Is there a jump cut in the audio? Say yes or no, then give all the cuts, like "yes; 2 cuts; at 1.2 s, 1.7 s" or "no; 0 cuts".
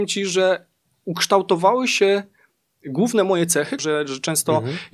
yes; 1 cut; at 3.8 s